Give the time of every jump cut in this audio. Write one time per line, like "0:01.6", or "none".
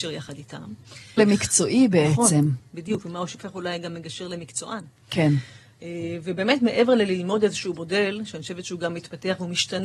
0:01.2